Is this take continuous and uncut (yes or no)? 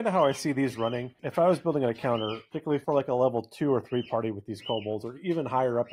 yes